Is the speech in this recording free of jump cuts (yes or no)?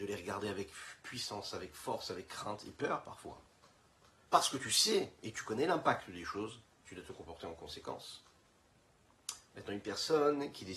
yes